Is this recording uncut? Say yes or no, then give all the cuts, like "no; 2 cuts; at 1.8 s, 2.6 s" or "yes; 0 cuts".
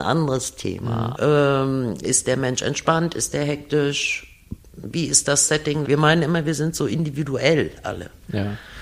no; 2 cuts; at 1.1 s, 5.8 s